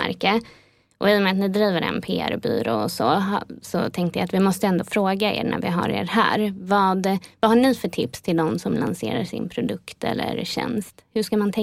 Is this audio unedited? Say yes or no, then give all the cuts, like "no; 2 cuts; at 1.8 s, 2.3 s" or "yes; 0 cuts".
yes; 0 cuts